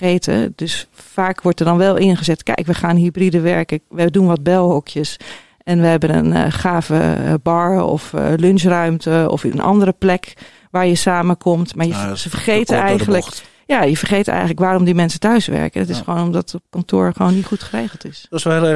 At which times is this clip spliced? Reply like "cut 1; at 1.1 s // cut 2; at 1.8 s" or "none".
none